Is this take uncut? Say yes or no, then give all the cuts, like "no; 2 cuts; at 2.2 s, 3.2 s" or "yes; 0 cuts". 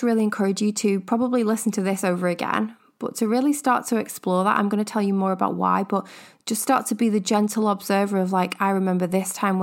yes; 0 cuts